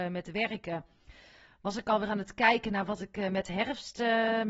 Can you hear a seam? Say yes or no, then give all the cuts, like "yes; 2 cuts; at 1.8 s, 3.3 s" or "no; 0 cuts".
no; 0 cuts